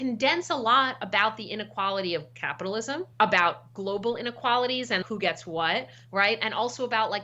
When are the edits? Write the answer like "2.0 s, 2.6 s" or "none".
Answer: 3.1 s, 5.0 s